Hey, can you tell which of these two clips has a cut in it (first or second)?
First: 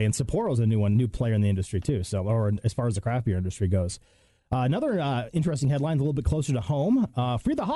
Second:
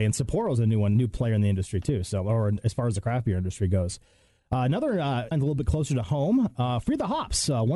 second